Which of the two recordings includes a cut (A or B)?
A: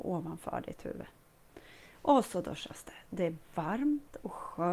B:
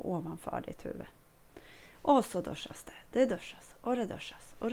A